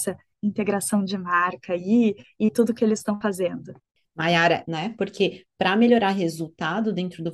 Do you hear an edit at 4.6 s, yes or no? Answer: yes